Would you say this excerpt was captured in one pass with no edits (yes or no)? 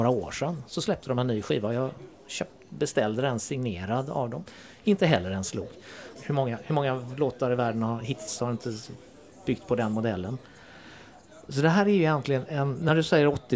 no